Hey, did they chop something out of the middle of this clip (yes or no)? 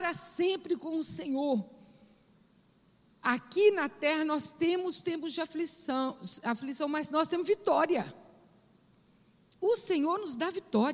no